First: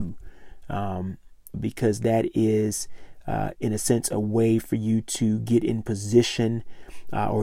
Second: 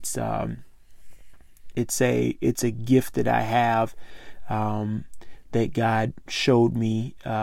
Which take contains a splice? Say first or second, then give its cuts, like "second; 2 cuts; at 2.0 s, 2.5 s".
first; 1 cut; at 1.5 s